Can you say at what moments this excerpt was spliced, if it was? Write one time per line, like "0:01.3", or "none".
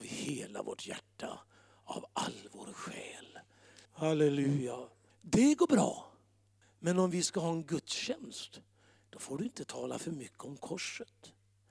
0:03.9
0:05.1
0:06.6